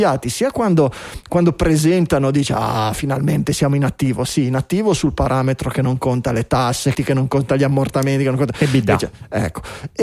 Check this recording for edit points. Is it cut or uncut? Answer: cut